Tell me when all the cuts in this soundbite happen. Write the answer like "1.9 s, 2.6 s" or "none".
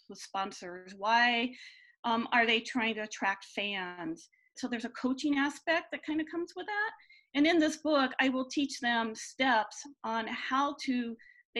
4.6 s